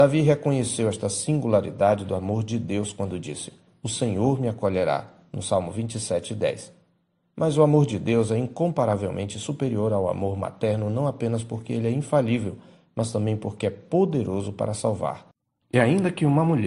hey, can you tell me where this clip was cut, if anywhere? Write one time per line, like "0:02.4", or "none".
0:03.7